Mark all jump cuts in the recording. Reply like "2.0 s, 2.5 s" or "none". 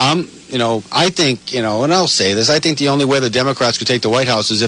none

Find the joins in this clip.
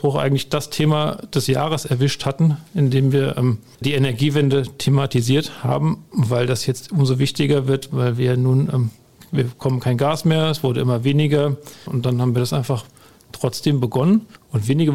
11.9 s

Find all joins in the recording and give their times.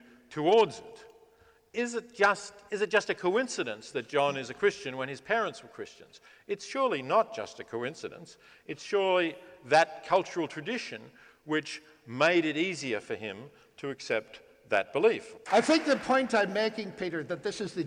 2.7 s, 15.5 s

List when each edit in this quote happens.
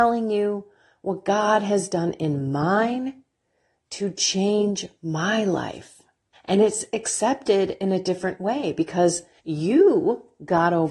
6.3 s, 9.4 s

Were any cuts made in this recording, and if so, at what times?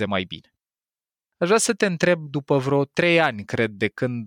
1.2 s

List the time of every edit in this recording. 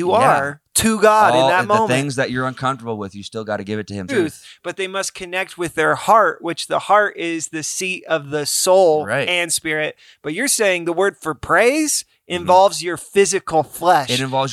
4.1 s

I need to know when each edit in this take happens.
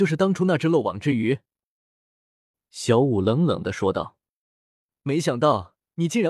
none

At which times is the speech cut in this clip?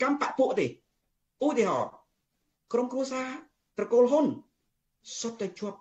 none

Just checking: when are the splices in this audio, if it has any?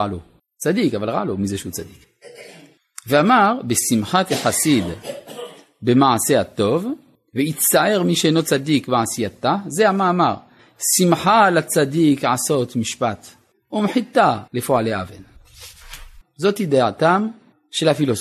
14.5 s, 16.2 s

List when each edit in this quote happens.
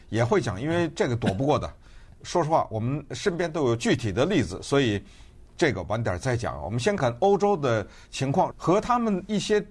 7.0 s, 8.5 s

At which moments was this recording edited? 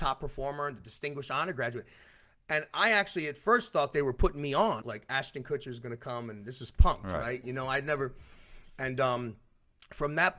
4.8 s

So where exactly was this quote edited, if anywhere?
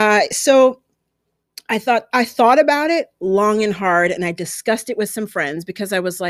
2.1 s

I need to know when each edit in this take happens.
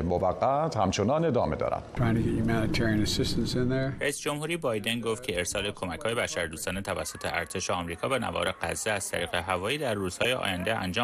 2.0 s

